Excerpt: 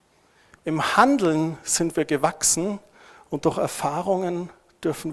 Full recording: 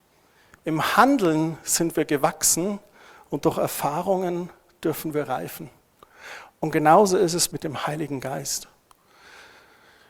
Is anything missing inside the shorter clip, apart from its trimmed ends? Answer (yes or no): no